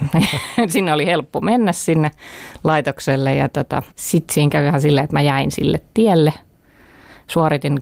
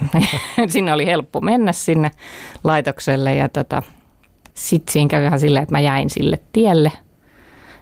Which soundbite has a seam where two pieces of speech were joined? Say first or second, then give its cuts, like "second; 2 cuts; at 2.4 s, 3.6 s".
first; 1 cut; at 3.9 s